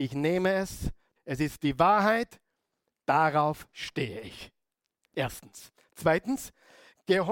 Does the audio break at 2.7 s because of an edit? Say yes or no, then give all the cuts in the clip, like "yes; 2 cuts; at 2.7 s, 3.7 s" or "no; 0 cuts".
no; 1 cut; at 1.2 s